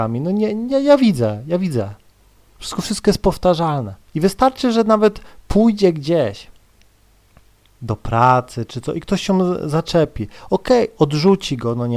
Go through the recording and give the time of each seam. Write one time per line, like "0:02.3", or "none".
0:04.0